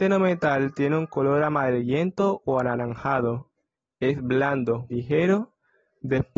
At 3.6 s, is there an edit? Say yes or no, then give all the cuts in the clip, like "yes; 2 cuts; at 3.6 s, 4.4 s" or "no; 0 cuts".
no; 1 cut; at 4.9 s